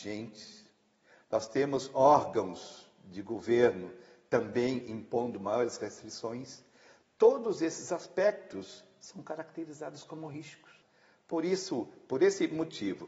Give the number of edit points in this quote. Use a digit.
0